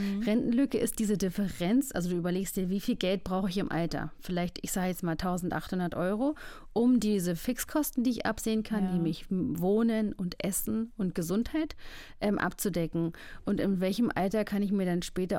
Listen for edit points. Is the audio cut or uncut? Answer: uncut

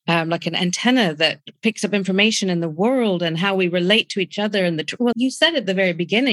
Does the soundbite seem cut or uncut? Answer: cut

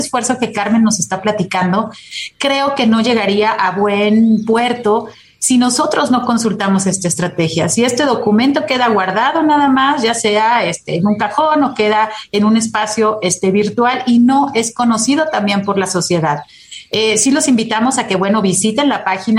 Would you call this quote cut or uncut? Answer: uncut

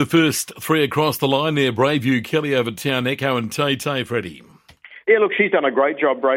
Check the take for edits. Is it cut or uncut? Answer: uncut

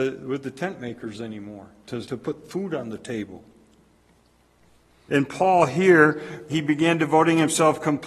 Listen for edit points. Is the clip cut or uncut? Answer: cut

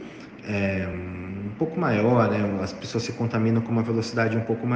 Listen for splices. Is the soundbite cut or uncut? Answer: uncut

